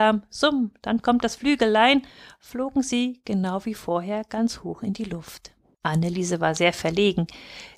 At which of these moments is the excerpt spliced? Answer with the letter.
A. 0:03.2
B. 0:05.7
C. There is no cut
B